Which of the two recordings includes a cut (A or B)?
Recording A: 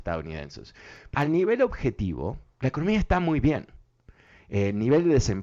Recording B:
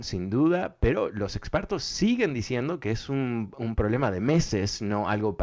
A